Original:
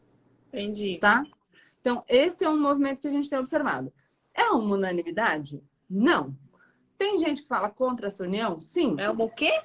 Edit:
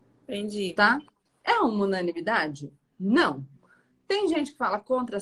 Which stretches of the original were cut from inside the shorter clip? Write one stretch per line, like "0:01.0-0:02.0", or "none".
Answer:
0:01.5-0:04.2